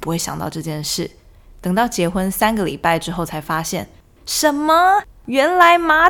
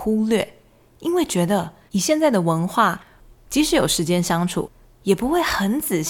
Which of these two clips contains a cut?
second; 2 cuts; at 1.9 s, 3.3 s

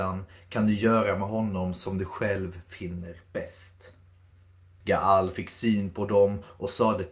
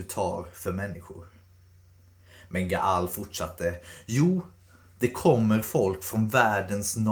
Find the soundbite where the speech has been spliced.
first; 1 cut; at 4.8 s

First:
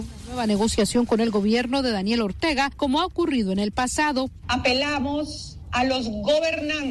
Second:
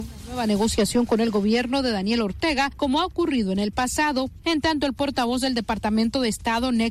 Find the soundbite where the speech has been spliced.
first; 1 cut; at 4.4 s

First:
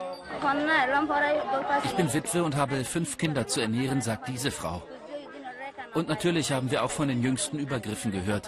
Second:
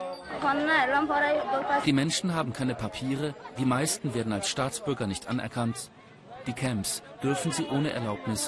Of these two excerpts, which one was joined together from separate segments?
second; 1 cut; at 1.8 s

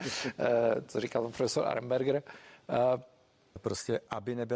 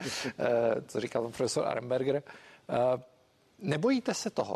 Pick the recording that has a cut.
first; 1 cut; at 3.6 s

